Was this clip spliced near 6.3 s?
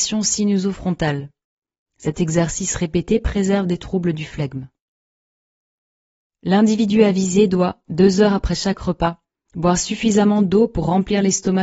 yes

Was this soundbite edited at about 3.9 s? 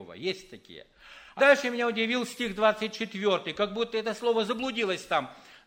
no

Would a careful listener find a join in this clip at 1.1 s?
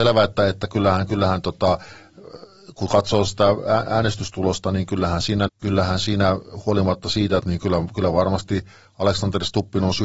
no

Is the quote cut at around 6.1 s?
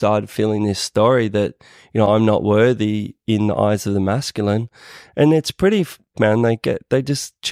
yes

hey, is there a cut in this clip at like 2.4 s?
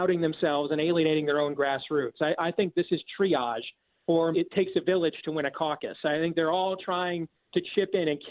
no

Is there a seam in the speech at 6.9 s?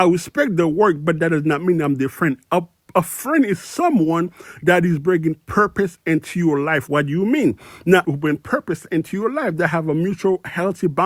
yes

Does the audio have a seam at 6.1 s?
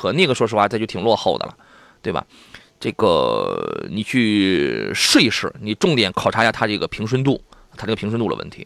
yes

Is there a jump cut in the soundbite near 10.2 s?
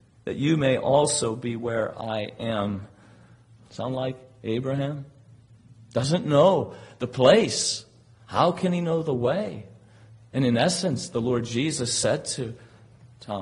no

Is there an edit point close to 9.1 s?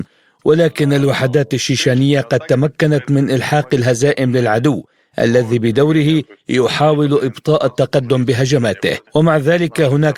yes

